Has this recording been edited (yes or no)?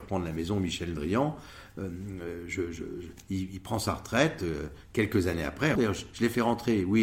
yes